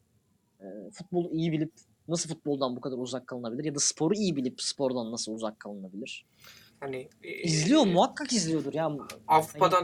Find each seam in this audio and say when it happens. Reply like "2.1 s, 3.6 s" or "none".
6.7 s